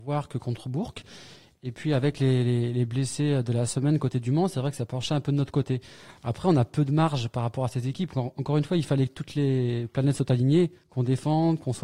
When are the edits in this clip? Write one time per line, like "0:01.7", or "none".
none

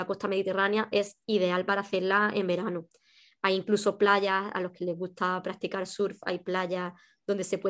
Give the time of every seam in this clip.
none

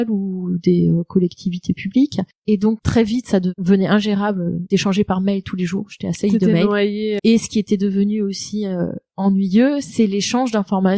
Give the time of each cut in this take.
0:07.2

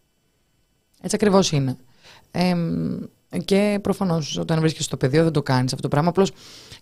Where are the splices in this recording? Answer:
none

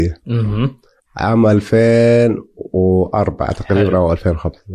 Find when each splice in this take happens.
0:01.0

